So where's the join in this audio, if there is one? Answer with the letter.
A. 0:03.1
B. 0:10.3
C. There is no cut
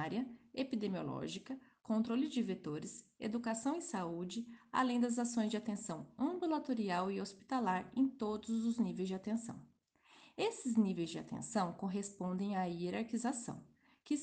C